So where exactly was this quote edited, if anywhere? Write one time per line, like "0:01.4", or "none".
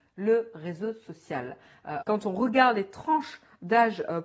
0:02.0